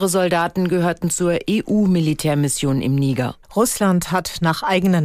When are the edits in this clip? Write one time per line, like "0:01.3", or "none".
0:03.4

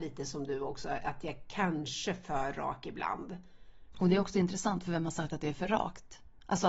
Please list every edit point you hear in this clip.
0:03.9

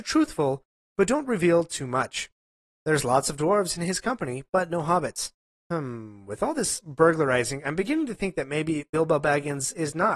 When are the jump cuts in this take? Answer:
0:02.8
0:05.5

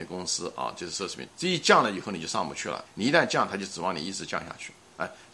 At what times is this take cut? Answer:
0:01.3
0:02.9

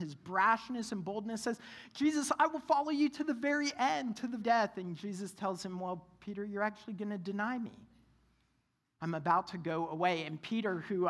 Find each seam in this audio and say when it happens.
0:04.4
0:09.0

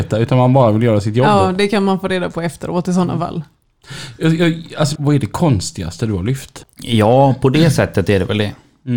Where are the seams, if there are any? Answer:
0:05.0
0:06.6

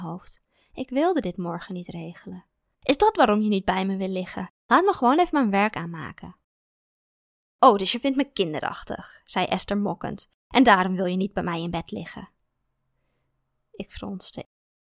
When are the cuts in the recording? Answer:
0:02.7
0:04.6

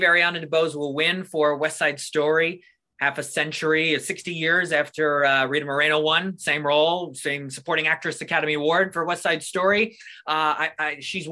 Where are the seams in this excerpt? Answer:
none

